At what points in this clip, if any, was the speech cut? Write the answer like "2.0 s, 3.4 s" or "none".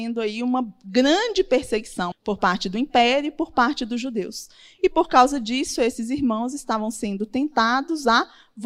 2.1 s